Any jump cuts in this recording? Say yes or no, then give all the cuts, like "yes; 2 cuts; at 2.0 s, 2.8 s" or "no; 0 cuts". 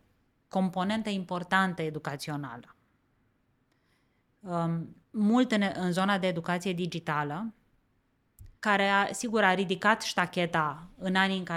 yes; 2 cuts; at 5.0 s, 8.6 s